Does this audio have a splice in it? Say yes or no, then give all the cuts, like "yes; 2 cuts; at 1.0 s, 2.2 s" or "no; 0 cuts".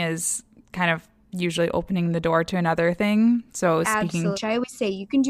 yes; 1 cut; at 4.3 s